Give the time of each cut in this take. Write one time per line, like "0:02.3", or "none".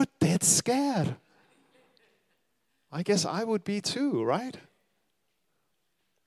none